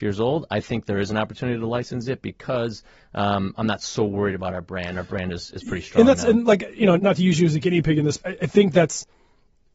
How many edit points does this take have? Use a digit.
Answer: 2